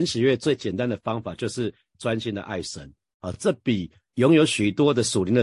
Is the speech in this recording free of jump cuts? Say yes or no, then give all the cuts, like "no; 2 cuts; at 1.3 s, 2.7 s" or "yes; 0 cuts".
yes; 0 cuts